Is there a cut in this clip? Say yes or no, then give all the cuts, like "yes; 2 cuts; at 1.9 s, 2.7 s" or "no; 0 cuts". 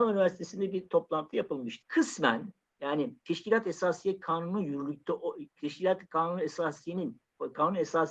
yes; 1 cut; at 1.8 s